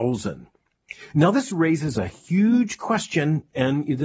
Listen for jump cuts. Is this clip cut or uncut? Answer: uncut